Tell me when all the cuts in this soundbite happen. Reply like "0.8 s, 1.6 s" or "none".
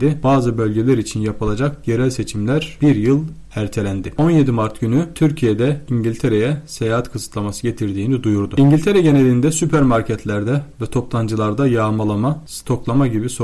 4.2 s